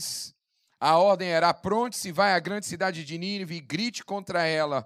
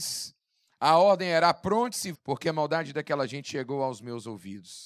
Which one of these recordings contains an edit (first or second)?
second